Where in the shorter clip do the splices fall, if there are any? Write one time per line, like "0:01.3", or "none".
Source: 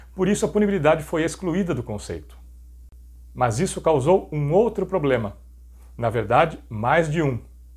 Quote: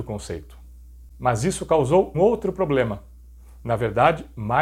0:01.1
0:02.1